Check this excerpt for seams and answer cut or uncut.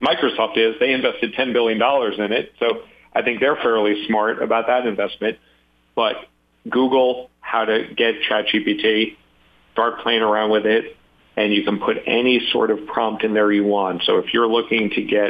uncut